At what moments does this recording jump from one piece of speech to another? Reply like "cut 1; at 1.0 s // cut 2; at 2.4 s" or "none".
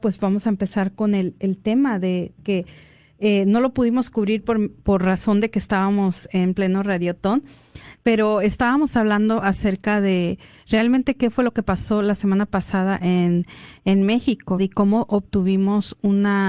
cut 1; at 2.4 s // cut 2; at 14.6 s